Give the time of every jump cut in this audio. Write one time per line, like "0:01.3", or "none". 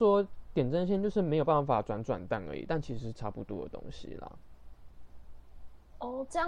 none